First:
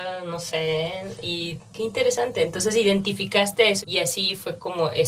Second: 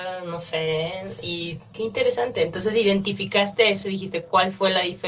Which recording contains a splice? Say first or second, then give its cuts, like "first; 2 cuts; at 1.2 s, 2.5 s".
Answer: first; 1 cut; at 3.8 s